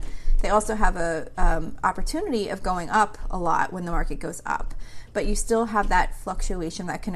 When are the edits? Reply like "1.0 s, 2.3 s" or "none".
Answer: none

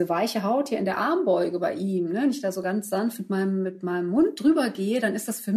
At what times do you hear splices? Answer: none

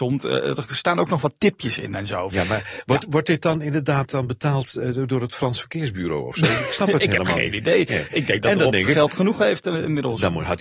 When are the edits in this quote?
2.3 s

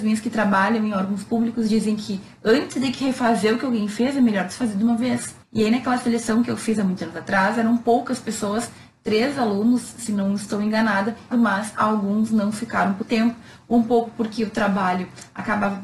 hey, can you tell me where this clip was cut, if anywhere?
5.4 s, 11.3 s, 13.0 s

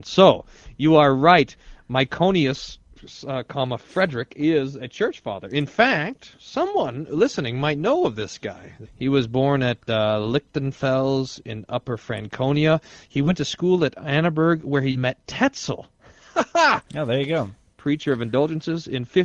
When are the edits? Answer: 8.9 s

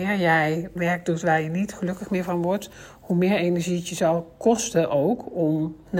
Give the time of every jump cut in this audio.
none

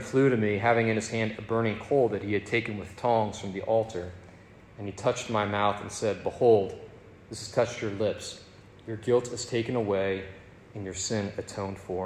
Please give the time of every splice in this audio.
none

